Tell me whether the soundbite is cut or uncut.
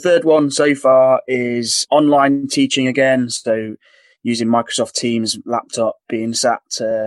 uncut